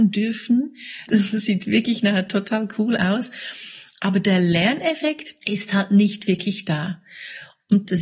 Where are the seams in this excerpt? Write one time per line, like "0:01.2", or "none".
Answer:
0:01.1